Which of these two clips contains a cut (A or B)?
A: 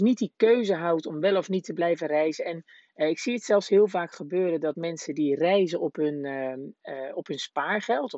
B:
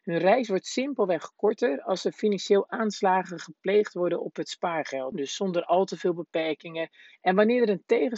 B